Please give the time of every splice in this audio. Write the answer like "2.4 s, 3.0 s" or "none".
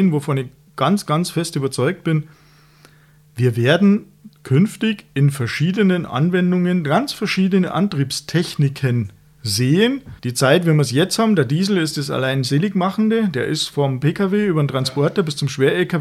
10.2 s